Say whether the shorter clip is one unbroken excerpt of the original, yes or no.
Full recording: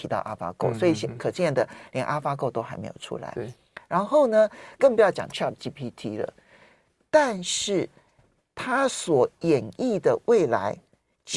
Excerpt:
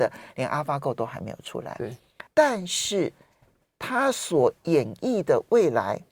no